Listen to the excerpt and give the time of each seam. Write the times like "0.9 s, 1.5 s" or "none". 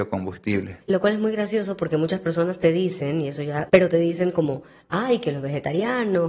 3.7 s